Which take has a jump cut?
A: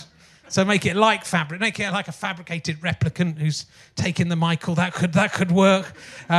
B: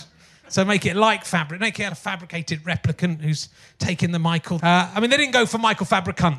B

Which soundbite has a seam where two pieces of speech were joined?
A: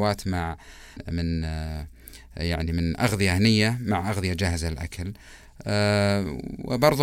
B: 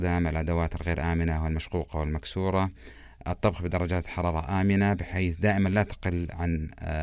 A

